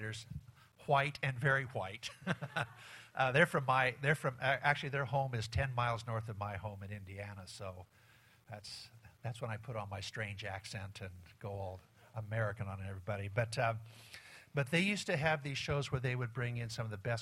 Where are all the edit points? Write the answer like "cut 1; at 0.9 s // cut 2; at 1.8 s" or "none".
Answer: none